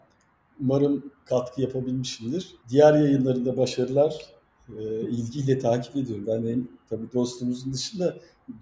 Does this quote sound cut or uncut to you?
cut